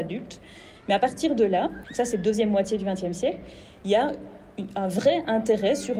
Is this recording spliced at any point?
yes; 1 cut; at 1.8 s

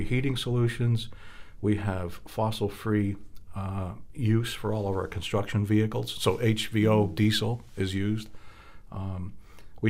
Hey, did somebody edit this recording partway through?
no; 0 cuts

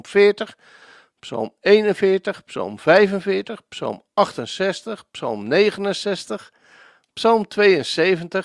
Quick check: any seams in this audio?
no; 0 cuts

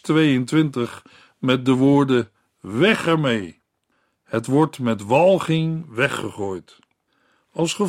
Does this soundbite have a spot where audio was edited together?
no; 0 cuts

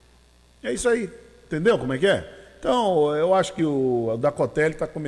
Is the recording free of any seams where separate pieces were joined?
yes; 0 cuts

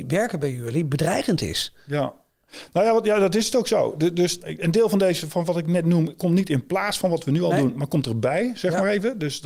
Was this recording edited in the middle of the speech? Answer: yes; 1 cut; at 4.4 s

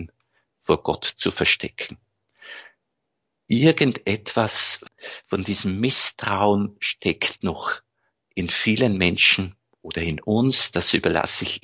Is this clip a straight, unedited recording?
yes; 0 cuts

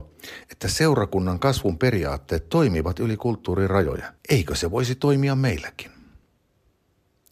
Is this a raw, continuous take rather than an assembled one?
no; 1 cut; at 4.2 s

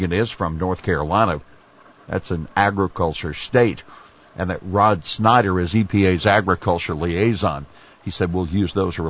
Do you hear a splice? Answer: no; 0 cuts

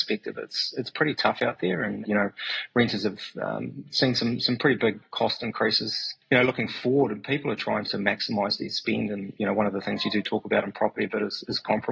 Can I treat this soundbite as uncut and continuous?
no; 1 cut; at 7.9 s

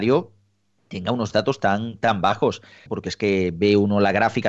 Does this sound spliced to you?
yes; 1 cut; at 2.9 s

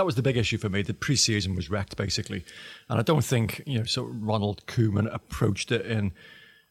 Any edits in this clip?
no; 0 cuts

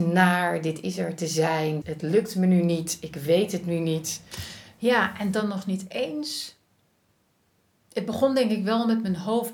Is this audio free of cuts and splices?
no; 1 cut; at 1.8 s

